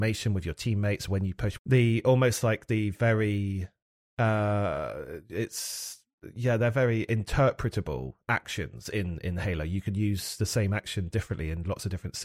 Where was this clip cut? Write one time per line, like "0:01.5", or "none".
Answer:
0:01.6

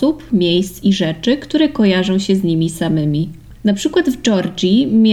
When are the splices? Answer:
0:03.5

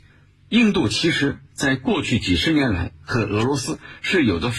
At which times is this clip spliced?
none

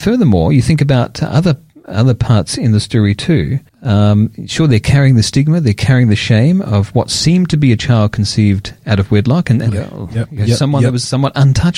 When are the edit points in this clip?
0:03.7
0:09.7

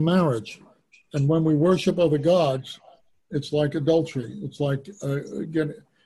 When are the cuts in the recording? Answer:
none

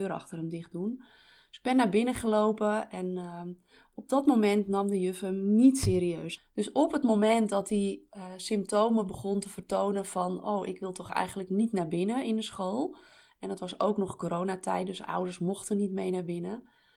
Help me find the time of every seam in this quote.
0:06.4

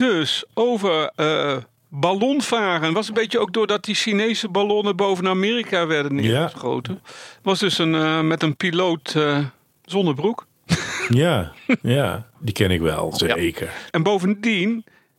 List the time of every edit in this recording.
0:07.0
0:12.3
0:13.9

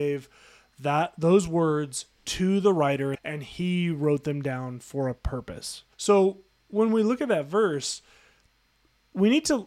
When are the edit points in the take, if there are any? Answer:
0:03.1
0:05.9

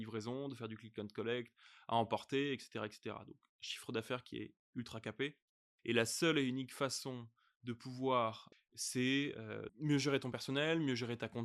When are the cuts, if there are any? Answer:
0:08.5
0:09.7

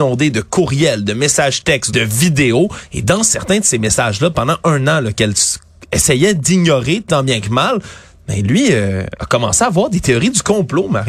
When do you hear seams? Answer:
0:01.9

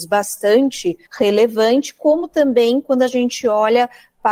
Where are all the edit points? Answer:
0:01.1

